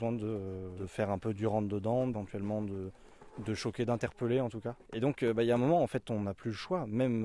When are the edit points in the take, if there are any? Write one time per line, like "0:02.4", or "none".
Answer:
0:04.8